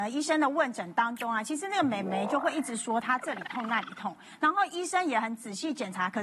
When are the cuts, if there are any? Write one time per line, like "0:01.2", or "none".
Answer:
none